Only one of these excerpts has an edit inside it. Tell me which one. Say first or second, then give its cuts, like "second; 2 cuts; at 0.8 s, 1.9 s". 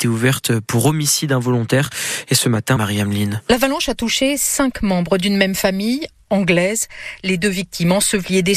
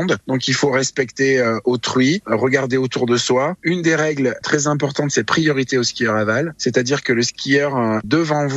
first; 1 cut; at 2.8 s